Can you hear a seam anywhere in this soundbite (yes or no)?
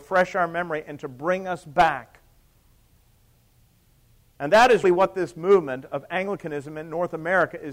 yes